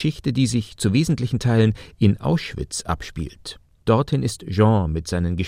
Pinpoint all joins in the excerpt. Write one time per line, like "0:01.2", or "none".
none